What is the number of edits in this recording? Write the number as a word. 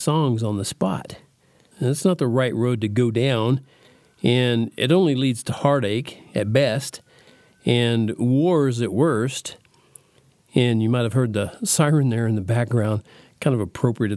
one